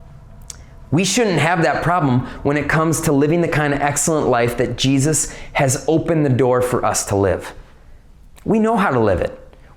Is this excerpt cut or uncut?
uncut